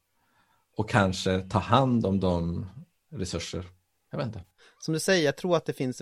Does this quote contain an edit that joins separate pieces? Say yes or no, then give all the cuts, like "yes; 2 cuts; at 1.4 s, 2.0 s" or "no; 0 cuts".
no; 0 cuts